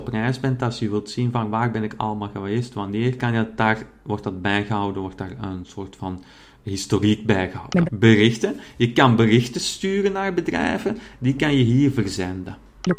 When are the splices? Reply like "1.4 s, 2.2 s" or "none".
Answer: 3.2 s, 7.8 s